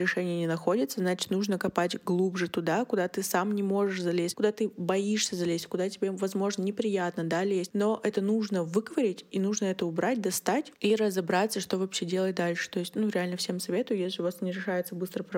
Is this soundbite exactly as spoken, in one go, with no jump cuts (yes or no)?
yes